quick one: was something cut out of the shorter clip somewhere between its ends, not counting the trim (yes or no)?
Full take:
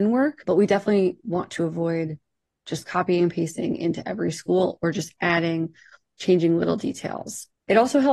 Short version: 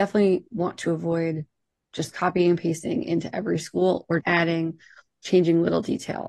yes